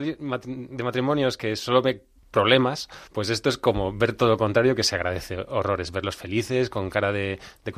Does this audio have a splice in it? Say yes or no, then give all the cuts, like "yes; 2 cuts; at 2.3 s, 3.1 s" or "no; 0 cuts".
yes; 1 cut; at 3.1 s